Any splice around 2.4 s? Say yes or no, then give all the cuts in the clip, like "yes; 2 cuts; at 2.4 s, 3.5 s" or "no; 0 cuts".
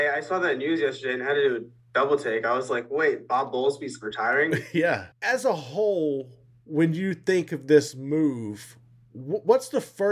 no; 1 cut; at 5.1 s